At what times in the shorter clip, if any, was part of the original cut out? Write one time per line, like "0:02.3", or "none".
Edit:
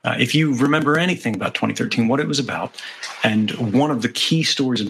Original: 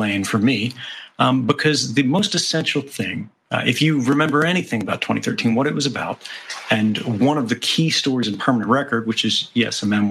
none